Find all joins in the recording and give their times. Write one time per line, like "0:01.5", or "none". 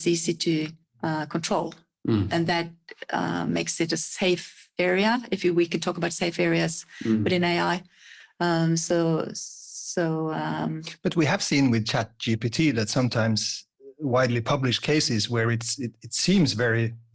none